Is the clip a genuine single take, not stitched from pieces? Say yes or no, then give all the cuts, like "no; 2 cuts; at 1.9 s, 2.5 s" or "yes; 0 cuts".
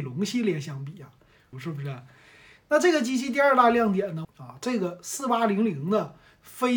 no; 2 cuts; at 1.5 s, 4.2 s